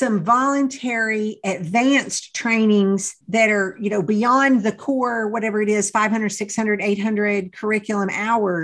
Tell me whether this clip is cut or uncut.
cut